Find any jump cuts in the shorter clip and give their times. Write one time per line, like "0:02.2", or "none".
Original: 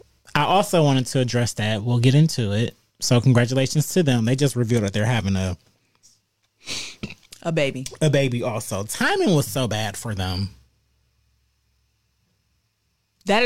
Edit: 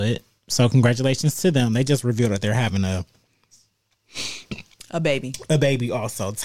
none